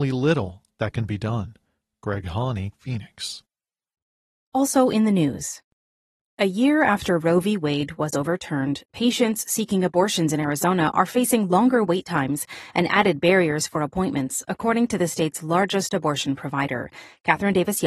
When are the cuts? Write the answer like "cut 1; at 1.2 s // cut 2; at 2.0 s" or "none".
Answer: cut 1; at 2.7 s